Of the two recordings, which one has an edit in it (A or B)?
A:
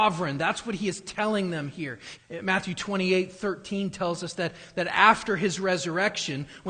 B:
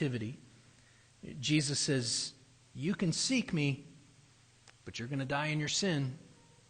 A